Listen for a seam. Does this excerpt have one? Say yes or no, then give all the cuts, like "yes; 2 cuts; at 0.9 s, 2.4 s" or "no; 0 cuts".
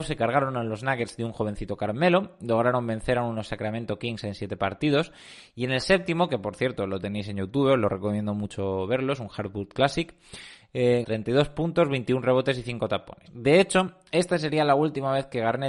yes; 2 cuts; at 11.0 s, 13.3 s